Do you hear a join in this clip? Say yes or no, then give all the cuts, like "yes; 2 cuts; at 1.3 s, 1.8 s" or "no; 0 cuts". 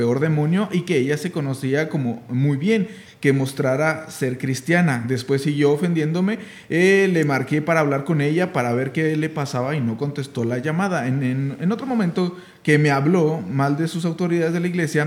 no; 0 cuts